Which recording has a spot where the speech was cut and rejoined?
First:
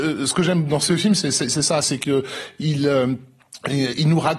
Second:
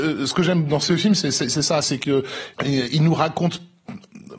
second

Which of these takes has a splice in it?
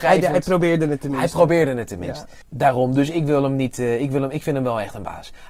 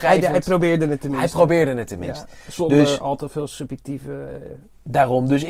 first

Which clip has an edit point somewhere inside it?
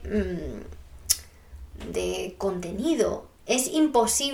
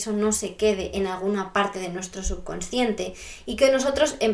first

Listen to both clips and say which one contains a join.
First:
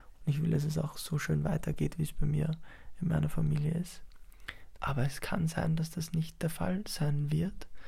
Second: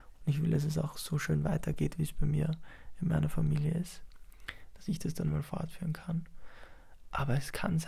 first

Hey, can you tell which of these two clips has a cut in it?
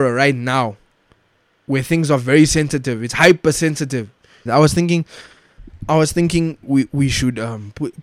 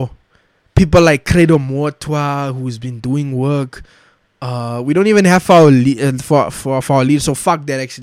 first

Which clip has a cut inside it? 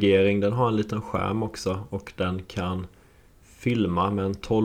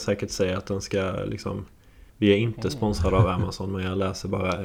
second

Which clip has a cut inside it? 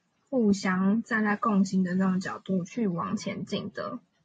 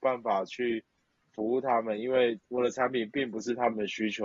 first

